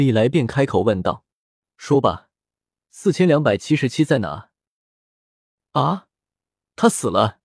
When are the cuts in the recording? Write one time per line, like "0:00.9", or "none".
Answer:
none